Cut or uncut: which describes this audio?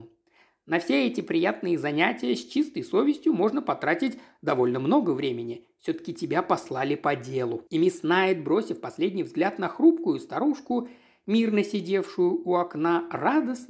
cut